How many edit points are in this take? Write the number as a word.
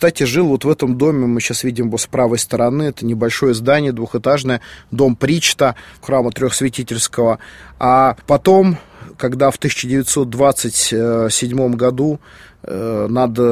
one